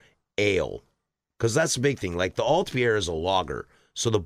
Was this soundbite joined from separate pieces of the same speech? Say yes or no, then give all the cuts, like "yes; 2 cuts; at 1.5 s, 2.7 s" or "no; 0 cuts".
no; 0 cuts